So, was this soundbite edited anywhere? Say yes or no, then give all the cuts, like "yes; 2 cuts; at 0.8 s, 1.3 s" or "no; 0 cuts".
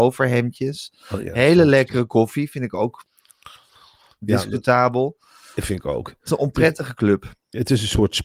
no; 0 cuts